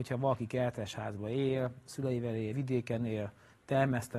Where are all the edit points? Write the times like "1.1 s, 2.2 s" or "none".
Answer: none